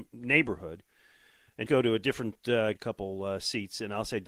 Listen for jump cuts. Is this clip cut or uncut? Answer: cut